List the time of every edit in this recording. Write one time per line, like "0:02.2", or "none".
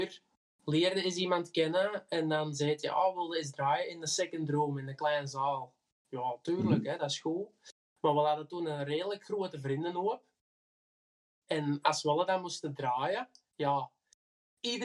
none